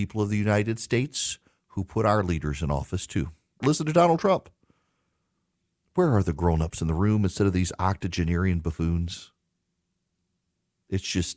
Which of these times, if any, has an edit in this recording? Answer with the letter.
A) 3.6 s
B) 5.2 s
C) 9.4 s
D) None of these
A